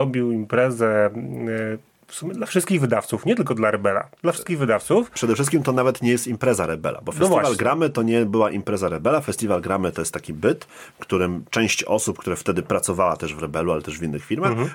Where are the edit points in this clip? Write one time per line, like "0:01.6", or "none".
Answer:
none